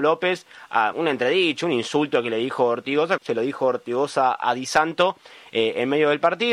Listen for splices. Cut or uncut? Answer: cut